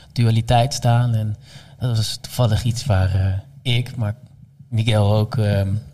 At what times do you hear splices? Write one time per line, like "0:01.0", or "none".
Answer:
none